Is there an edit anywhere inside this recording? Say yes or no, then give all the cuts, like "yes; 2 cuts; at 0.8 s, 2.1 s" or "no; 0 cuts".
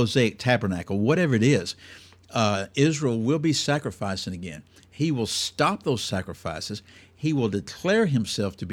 no; 0 cuts